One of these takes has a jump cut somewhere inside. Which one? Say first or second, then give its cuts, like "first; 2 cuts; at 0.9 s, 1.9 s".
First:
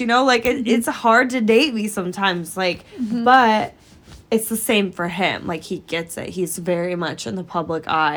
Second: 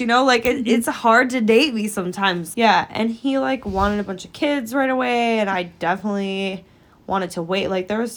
second; 1 cut; at 2.5 s